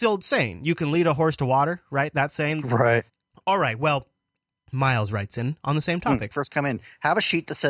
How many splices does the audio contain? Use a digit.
2